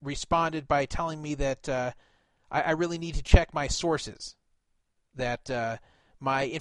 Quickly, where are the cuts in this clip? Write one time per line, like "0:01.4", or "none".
none

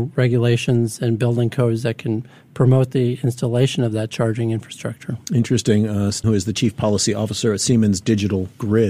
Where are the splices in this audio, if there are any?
0:06.2

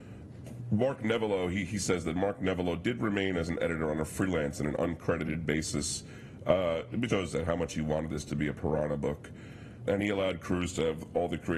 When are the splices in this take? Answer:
0:07.1
0:09.9

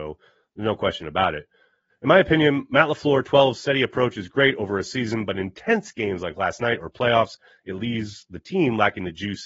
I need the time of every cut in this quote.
0:01.9

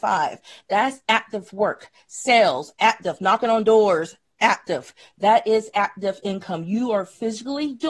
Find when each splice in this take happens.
none

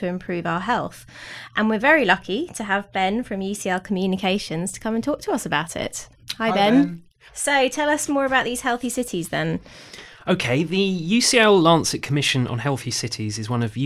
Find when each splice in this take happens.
0:07.3

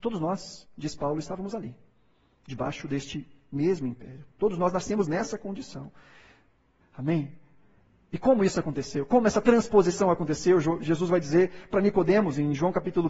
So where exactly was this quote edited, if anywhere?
0:06.8

